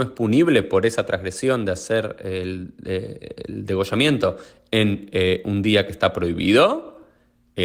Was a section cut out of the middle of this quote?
no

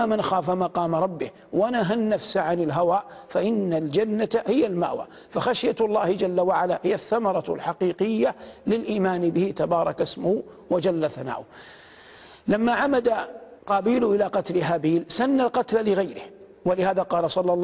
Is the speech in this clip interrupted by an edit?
yes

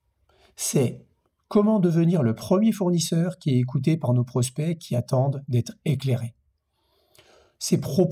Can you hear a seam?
no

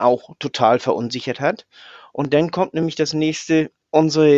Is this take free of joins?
yes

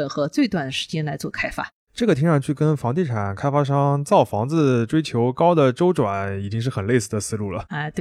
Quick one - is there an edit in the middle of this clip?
no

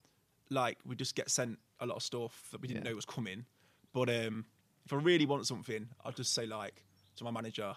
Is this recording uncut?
yes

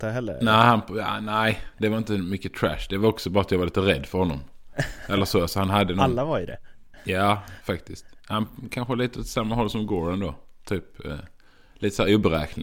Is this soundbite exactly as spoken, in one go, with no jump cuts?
yes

